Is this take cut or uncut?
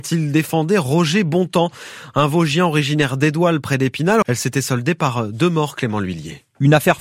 cut